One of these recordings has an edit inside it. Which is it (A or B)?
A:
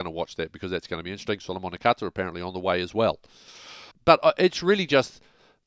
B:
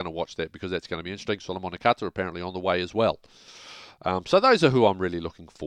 A